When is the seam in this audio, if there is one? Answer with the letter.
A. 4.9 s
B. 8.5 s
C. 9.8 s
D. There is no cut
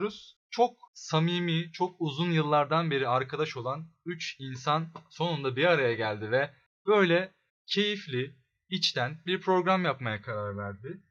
B